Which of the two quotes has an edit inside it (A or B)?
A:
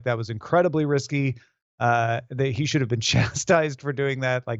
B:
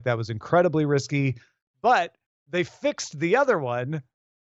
B